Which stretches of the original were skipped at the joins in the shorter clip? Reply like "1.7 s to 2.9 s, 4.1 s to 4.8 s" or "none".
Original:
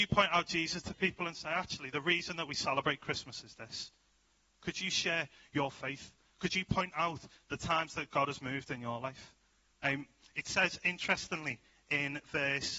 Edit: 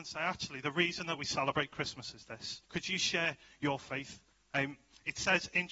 4.0 s to 4.6 s, 6.3 s to 9.6 s